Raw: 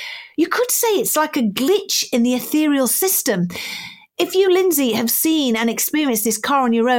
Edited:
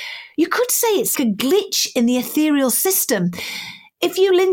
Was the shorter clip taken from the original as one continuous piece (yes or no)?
no